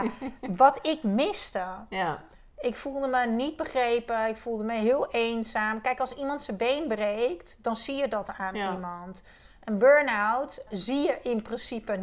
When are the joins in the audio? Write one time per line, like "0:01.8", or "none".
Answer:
0:10.7